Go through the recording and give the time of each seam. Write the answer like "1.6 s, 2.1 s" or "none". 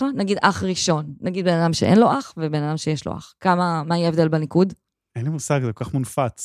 none